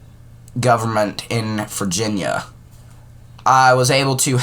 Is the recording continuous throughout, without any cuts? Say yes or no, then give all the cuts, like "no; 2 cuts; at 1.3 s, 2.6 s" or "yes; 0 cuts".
yes; 0 cuts